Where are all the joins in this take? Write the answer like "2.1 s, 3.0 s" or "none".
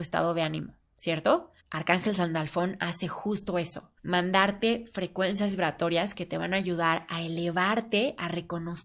1.6 s, 4.0 s